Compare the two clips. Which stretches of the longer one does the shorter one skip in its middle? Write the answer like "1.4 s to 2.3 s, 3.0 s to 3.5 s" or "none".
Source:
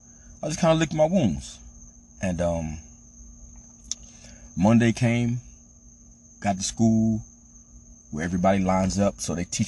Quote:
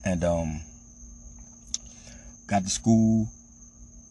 4.5 s to 6.3 s

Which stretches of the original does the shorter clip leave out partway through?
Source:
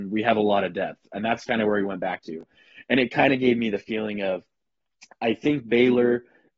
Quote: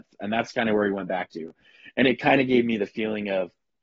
none

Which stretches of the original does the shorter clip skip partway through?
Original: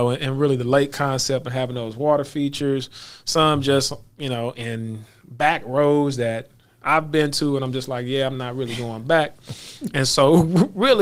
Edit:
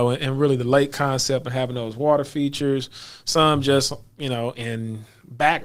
none

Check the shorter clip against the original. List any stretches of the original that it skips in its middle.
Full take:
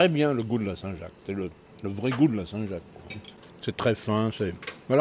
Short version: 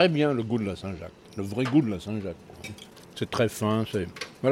1.3 s to 1.7 s

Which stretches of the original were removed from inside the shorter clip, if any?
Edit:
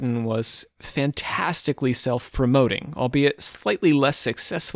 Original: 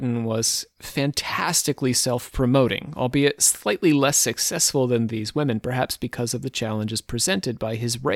none

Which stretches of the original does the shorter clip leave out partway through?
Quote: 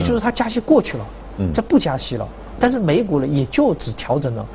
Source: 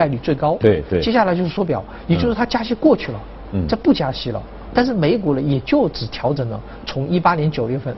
none

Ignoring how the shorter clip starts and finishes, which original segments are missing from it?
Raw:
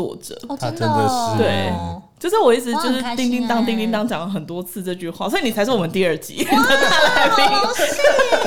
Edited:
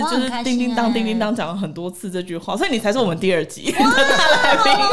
none

